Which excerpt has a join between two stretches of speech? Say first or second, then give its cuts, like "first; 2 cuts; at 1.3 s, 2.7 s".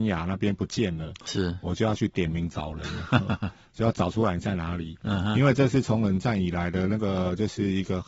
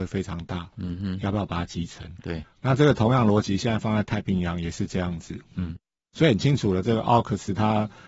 second; 1 cut; at 2.2 s